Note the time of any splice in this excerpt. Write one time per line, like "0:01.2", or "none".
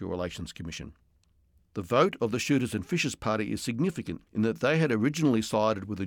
0:01.6
0:04.3